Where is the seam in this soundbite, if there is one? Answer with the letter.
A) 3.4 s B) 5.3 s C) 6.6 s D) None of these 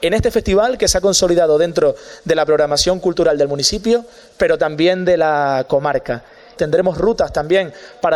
C